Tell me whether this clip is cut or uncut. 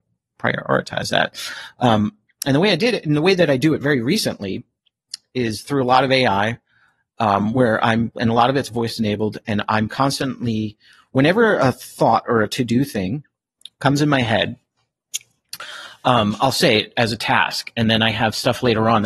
uncut